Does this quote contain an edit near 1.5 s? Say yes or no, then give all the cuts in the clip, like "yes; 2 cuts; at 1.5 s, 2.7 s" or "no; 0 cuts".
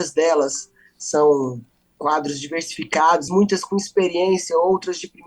no; 1 cut; at 3.3 s